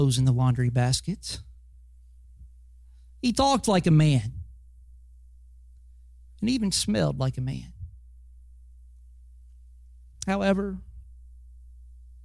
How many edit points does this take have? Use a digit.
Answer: 0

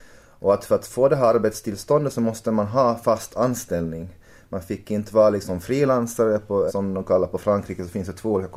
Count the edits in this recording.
1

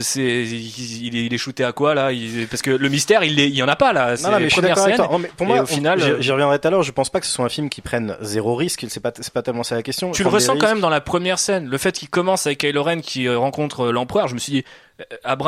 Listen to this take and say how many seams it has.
1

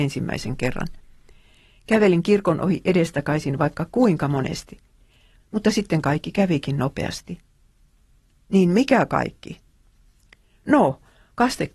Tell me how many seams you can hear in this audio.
1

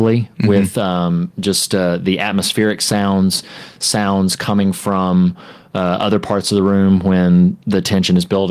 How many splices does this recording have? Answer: 0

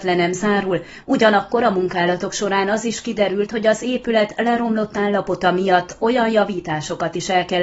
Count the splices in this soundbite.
1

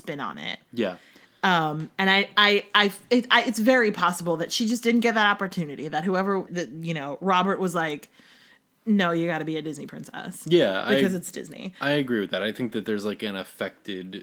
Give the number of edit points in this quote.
1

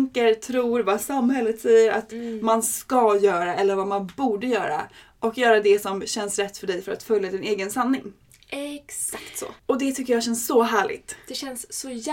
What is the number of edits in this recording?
1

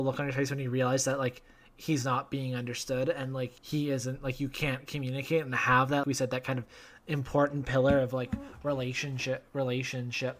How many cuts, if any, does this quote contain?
2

